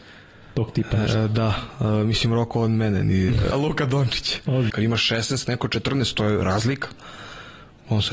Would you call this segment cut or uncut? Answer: cut